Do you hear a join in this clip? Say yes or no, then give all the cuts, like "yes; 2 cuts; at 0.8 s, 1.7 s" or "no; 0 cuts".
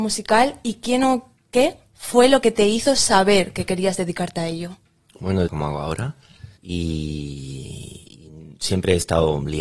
yes; 2 cuts; at 5.5 s, 6.6 s